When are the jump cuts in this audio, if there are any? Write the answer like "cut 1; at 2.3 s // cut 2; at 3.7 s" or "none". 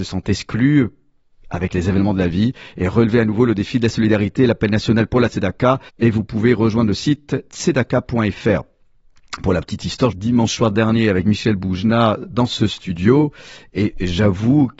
cut 1; at 5.9 s // cut 2; at 10.1 s